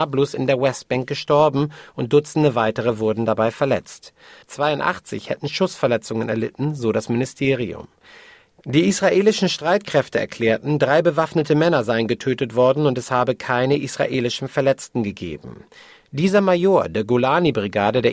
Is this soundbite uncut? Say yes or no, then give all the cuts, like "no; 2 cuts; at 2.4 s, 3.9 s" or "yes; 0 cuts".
no; 2 cuts; at 4.4 s, 16.0 s